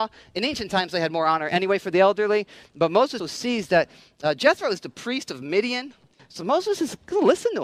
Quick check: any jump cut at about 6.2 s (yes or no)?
yes